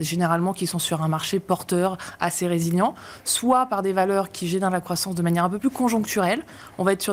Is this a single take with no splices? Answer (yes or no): yes